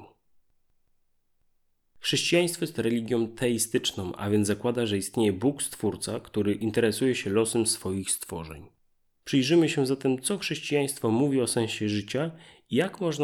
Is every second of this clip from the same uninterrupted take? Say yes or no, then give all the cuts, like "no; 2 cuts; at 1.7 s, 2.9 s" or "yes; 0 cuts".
no; 2 cuts; at 1.8 s, 9.2 s